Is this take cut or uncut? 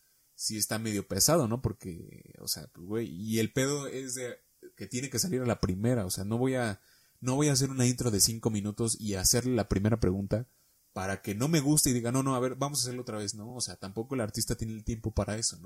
uncut